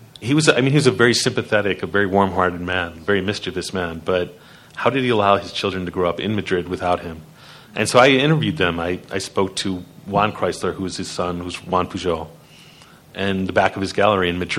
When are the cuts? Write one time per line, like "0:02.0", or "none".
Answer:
none

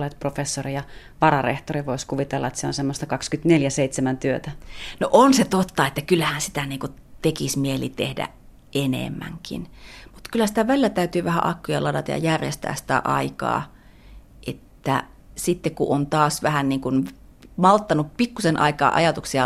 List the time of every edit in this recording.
none

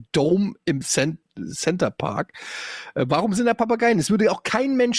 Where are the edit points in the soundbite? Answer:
none

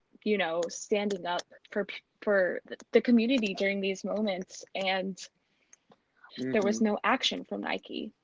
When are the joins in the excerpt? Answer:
0:01.6
0:02.7
0:06.3

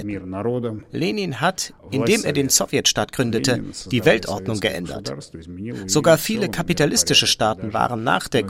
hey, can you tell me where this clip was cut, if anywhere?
none

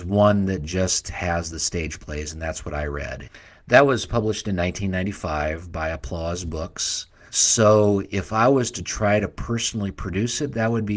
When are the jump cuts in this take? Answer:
0:07.3

